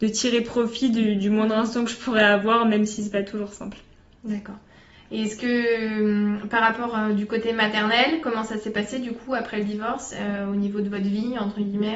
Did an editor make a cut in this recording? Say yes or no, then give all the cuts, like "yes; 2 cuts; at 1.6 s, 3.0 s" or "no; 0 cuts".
no; 0 cuts